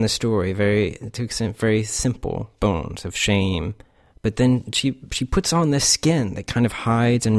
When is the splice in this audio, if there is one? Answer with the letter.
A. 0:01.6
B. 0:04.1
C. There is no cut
C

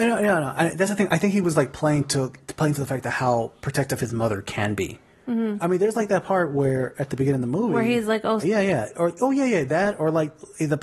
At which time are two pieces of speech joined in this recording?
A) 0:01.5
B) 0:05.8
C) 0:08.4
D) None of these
C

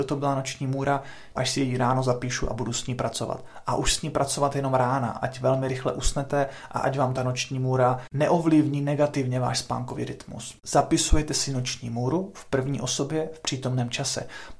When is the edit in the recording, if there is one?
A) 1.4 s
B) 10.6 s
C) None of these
A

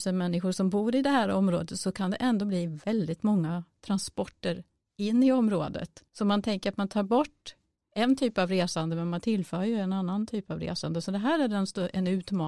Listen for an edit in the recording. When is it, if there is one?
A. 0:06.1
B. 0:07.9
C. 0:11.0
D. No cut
A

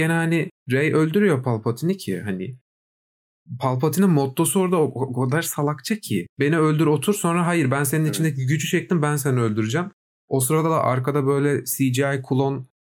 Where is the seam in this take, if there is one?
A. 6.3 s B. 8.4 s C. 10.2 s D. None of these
D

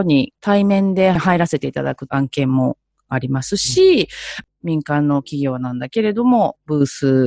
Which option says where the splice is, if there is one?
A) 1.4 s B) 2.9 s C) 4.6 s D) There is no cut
D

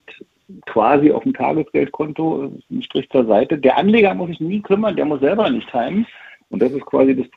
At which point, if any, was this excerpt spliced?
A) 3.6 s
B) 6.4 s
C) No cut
B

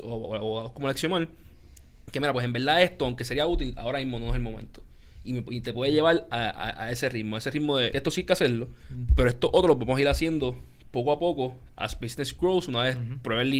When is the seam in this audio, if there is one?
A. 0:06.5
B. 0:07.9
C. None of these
B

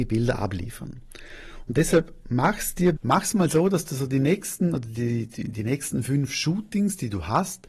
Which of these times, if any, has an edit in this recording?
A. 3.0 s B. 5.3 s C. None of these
A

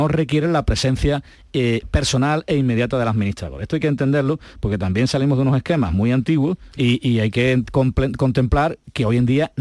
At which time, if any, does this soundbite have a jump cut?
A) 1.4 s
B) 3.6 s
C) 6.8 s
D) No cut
C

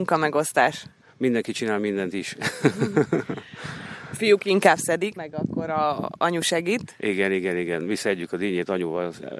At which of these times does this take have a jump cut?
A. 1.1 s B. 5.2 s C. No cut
B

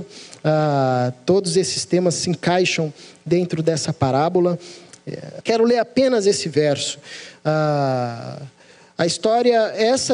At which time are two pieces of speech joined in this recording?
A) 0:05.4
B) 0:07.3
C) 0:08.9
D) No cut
A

